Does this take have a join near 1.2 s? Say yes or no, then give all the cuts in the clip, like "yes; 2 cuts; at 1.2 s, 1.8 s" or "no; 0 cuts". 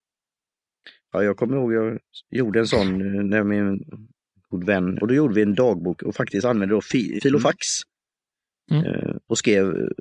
no; 2 cuts; at 5.0 s, 7.2 s